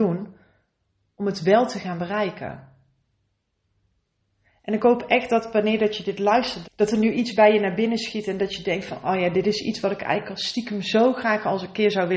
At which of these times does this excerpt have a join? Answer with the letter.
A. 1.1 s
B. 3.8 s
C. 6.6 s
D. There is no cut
C